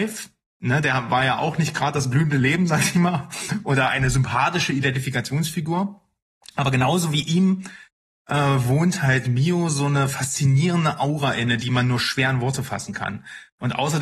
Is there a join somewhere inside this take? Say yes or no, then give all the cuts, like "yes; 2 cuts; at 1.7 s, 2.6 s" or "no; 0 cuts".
no; 0 cuts